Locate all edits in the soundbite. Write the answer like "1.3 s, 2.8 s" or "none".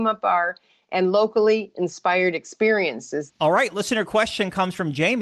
3.3 s